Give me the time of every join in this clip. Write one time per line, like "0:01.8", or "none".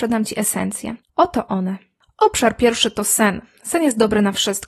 0:01.1